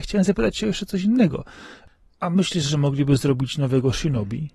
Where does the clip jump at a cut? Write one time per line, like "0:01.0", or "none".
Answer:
none